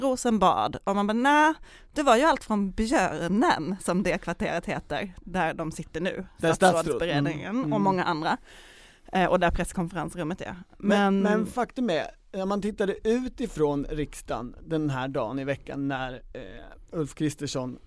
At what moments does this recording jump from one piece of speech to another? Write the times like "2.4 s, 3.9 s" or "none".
none